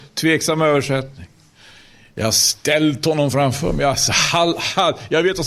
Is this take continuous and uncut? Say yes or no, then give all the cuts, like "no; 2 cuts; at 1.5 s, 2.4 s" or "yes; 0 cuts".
yes; 0 cuts